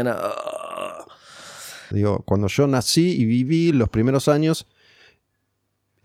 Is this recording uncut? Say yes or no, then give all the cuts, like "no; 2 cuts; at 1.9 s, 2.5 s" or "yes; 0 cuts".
no; 1 cut; at 1.9 s